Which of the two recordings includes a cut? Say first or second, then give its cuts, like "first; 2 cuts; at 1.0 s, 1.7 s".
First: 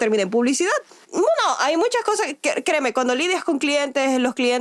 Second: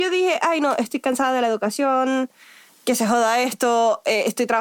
first; 1 cut; at 1.0 s